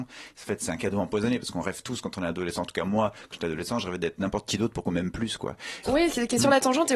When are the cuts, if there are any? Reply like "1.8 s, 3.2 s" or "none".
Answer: 5.8 s